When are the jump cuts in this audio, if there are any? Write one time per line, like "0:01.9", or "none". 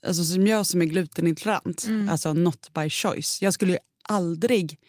none

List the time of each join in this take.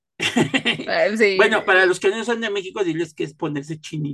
none

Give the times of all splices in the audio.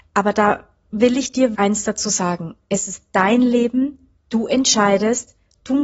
0:01.5

